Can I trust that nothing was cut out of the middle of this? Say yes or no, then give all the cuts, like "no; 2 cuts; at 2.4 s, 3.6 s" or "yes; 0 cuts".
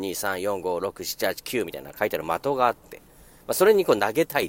yes; 0 cuts